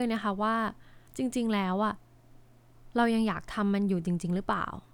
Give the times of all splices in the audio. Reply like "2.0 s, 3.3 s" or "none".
1.1 s